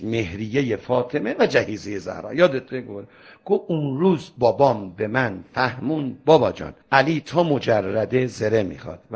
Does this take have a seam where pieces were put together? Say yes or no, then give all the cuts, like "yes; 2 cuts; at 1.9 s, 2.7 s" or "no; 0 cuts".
yes; 1 cut; at 6.8 s